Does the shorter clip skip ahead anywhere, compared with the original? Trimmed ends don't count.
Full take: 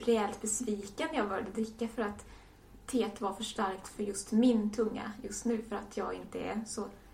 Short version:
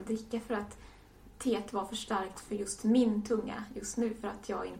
no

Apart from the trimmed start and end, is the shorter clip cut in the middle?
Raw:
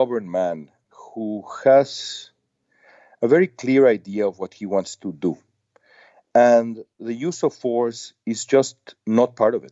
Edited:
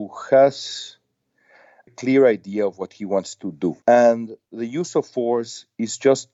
yes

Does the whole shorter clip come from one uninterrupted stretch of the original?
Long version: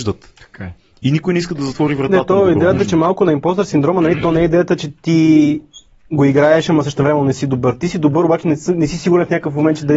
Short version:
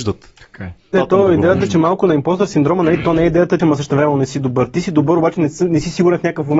no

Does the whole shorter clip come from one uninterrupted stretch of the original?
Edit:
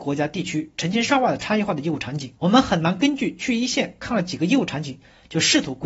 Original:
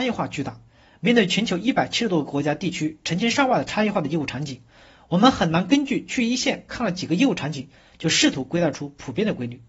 no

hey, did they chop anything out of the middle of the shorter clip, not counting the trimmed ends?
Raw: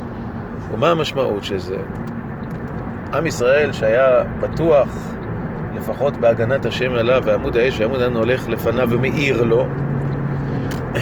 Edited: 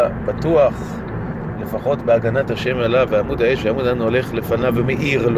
no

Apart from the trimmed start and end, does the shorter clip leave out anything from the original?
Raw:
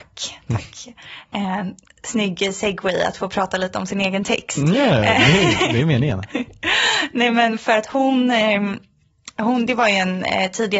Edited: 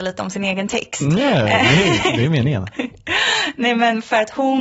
no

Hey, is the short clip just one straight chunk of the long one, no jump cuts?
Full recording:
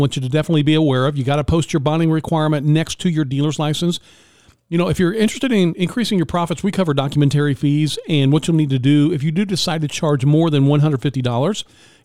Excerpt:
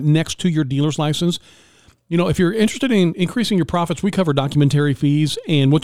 yes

